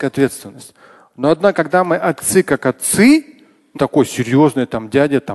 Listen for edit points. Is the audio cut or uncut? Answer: cut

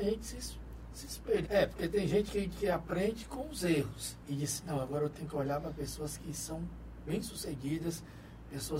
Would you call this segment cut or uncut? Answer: cut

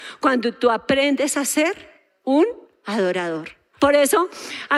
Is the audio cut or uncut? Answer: cut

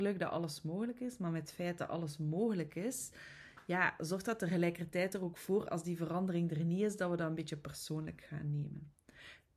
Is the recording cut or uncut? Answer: uncut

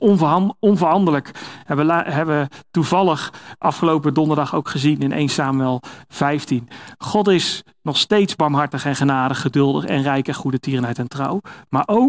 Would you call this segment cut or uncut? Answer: uncut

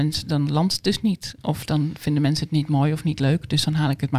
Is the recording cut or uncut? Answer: uncut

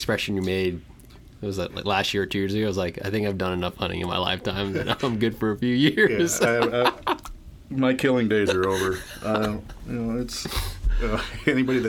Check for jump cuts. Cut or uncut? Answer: uncut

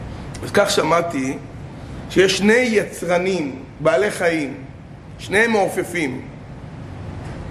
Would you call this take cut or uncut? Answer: uncut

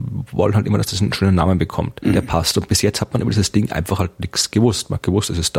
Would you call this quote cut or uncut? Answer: uncut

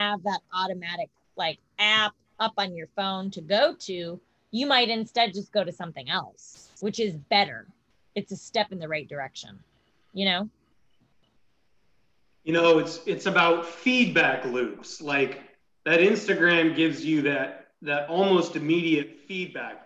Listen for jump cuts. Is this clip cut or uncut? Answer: uncut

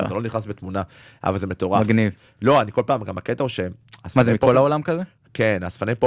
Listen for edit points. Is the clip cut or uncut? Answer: uncut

